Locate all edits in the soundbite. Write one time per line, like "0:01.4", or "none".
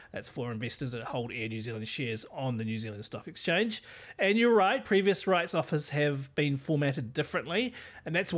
none